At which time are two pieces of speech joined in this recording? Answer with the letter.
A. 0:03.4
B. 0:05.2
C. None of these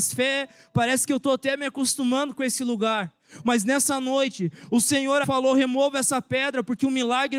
B